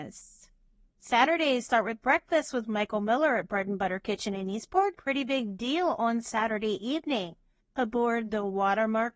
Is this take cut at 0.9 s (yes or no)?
no